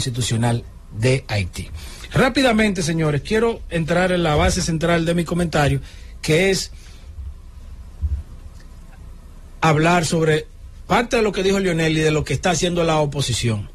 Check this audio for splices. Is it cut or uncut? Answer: uncut